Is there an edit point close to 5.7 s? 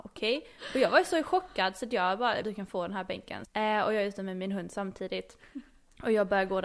no; 2 cuts; at 2.4 s, 3.4 s

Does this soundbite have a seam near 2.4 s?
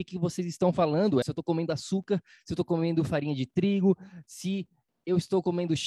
no; 1 cut; at 1.2 s

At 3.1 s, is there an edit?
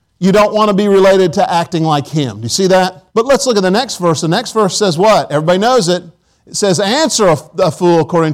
yes; 1 cut; at 3.1 s

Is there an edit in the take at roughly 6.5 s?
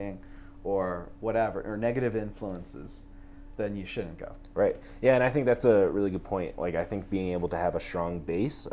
no; 1 cut; at 3.6 s

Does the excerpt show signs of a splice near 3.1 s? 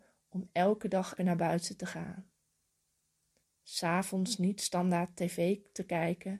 no; 1 cut; at 1.2 s

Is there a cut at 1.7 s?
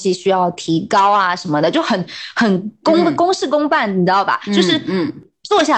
no; 0 cuts

